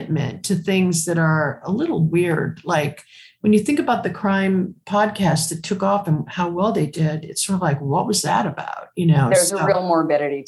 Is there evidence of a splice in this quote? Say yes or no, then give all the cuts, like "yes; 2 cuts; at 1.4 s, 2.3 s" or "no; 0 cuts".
no; 0 cuts